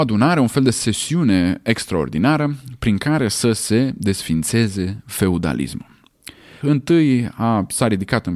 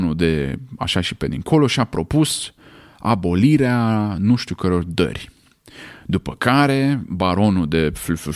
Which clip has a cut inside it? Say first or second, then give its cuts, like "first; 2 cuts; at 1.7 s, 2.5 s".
first; 1 cut; at 6.6 s